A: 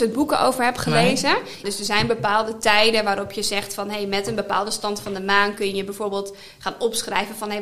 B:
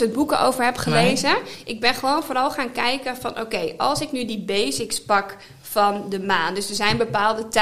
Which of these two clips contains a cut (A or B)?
A